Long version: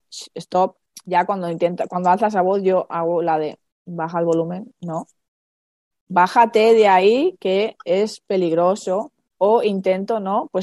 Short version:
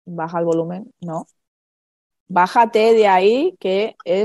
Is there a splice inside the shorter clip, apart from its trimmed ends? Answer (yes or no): no